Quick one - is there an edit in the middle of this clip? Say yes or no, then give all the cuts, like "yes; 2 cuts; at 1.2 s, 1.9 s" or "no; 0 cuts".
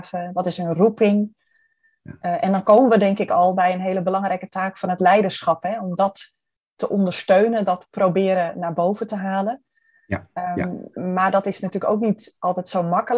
no; 0 cuts